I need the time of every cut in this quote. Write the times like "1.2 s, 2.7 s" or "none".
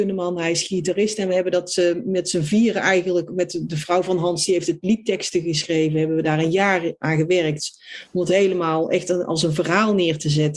none